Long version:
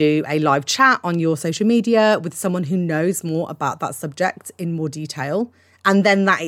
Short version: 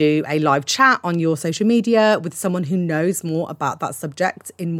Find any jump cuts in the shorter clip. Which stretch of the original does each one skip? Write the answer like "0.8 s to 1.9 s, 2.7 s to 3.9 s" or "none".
none